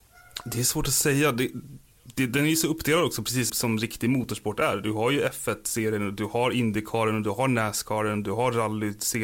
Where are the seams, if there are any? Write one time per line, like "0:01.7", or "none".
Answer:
0:03.5